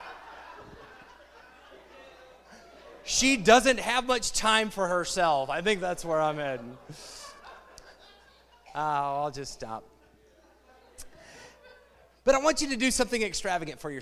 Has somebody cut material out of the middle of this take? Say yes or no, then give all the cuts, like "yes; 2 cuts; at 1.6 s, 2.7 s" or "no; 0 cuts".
no; 0 cuts